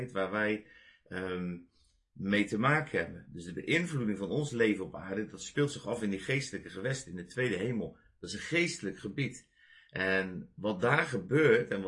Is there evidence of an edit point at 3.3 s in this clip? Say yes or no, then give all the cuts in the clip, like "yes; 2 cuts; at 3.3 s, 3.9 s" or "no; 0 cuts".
no; 0 cuts